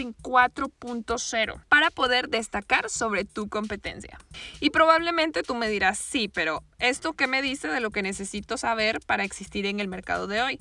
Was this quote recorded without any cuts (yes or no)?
no